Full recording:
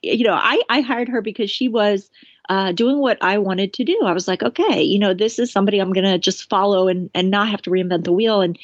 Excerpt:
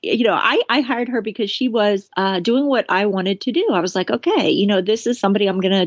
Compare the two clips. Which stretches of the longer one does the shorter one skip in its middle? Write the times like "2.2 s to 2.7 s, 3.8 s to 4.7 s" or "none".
2.1 s to 2.4 s

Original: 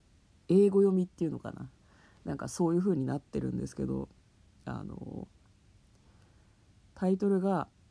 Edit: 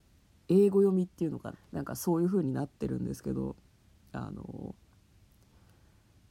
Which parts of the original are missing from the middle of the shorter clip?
1.5 s to 2.0 s

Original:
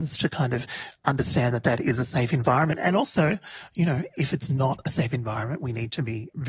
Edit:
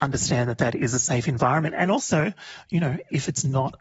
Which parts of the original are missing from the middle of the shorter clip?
none

